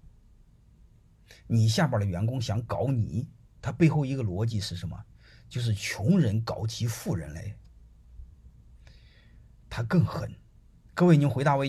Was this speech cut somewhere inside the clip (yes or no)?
no